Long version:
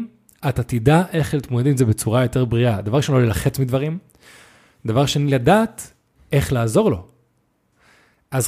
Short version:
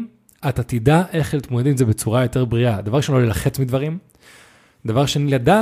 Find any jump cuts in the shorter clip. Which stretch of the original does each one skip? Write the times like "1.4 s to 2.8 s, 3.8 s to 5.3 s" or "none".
none